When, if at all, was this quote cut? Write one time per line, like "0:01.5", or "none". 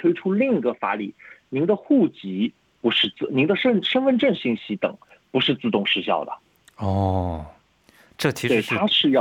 none